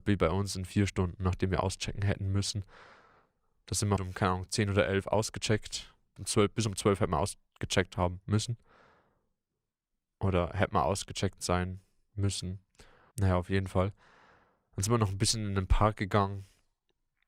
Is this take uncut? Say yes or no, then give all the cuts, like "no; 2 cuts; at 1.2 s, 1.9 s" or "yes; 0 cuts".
no; 3 cuts; at 4.0 s, 6.2 s, 13.1 s